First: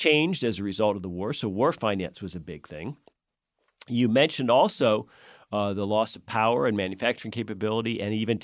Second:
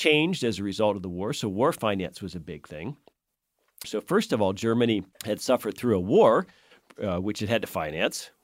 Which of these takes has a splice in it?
second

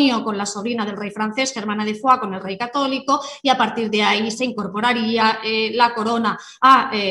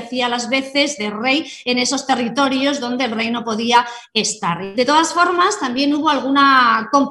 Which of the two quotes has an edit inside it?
second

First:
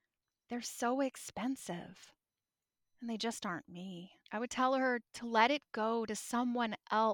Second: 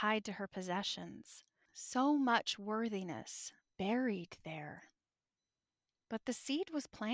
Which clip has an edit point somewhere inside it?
first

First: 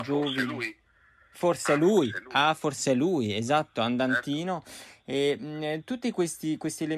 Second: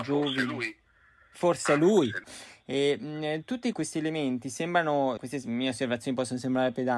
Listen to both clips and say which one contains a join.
second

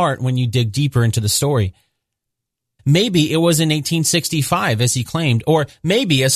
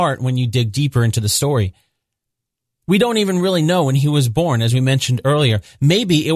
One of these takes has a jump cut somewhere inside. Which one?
first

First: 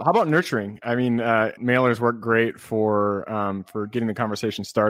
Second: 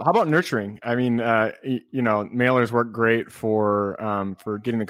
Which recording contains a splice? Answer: first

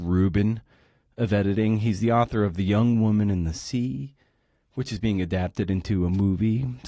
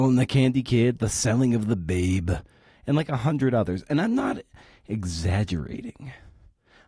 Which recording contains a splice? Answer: second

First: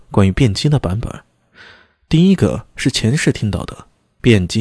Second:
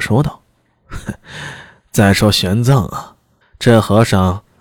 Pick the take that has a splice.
second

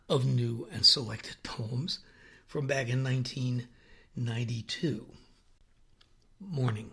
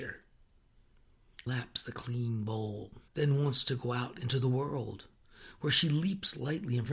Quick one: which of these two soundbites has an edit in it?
second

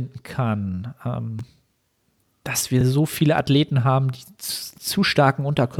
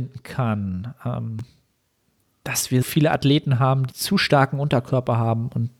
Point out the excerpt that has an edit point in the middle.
second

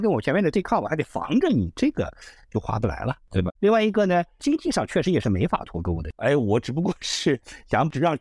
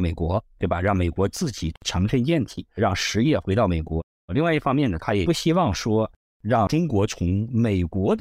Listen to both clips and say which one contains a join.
first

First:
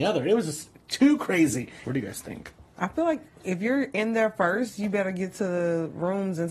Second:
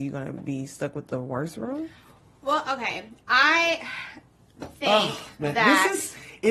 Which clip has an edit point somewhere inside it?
first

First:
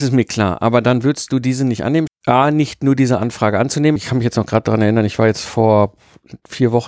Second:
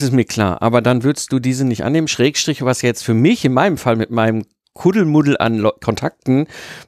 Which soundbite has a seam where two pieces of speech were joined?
first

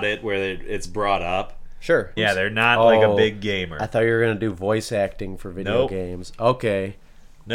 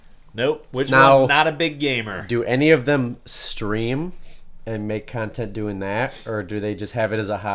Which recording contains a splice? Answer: first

